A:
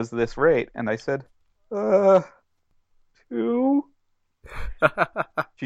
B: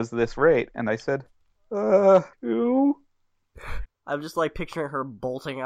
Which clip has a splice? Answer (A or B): B